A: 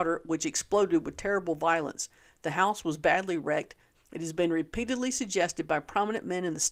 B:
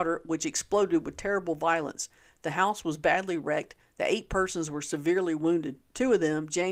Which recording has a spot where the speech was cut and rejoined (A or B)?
A